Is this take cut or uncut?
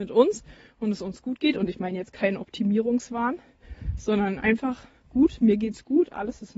uncut